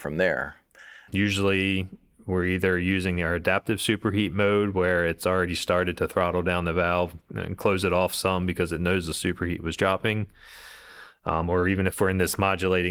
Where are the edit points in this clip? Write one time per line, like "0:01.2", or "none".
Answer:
0:01.1